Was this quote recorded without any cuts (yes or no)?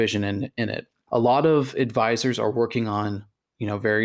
yes